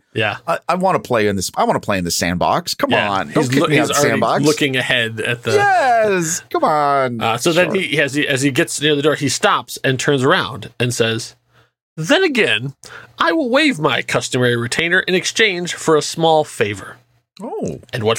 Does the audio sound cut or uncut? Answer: uncut